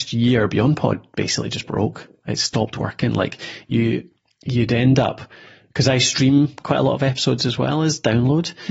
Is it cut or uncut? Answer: uncut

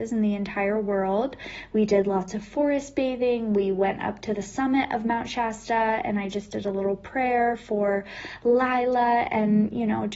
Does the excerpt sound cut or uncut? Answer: uncut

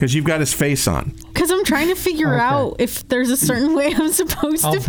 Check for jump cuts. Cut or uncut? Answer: uncut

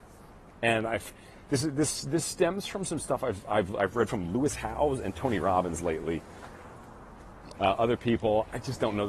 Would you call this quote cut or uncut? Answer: cut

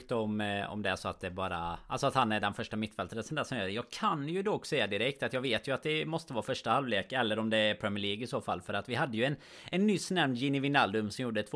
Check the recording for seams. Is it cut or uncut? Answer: uncut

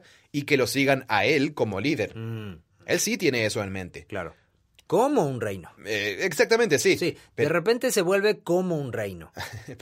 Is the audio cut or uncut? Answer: cut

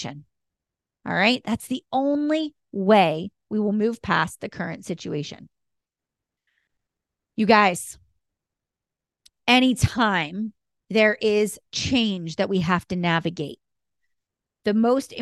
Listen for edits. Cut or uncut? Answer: uncut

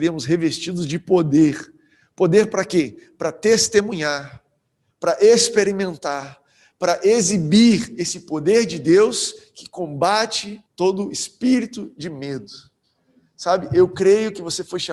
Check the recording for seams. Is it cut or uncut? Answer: cut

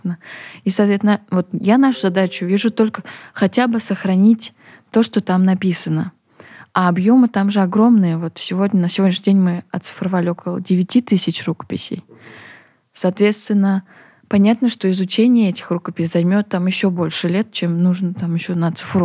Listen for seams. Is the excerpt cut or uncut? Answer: uncut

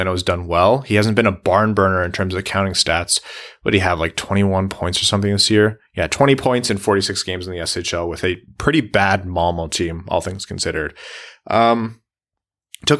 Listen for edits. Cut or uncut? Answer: uncut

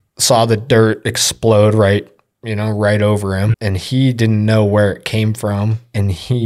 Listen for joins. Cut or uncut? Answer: cut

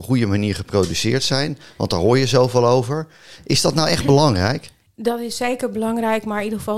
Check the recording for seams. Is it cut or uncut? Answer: uncut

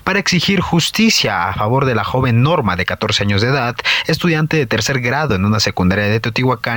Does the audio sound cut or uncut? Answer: uncut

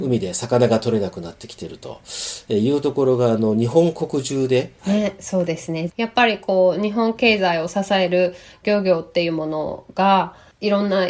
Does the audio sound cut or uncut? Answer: cut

